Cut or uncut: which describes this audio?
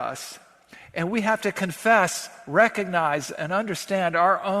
uncut